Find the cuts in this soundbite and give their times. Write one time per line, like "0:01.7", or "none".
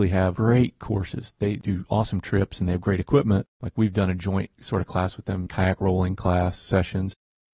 0:03.6
0:05.5